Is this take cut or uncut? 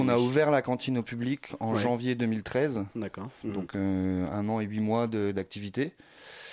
cut